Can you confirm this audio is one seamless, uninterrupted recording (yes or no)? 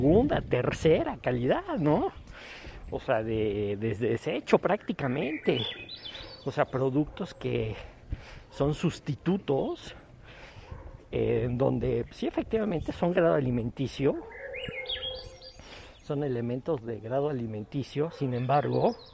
yes